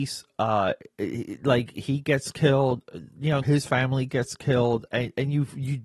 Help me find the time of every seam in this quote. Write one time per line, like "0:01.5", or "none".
0:03.4